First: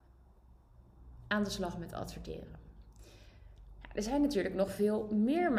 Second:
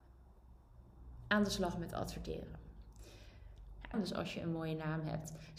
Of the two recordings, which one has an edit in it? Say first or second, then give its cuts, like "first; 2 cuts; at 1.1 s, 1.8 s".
second; 1 cut; at 3.9 s